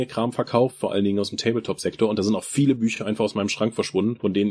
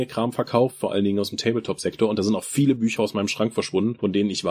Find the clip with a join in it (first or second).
second